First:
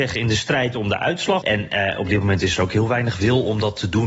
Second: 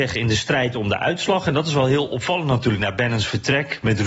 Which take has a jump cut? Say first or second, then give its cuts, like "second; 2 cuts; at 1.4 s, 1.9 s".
first; 1 cut; at 1.4 s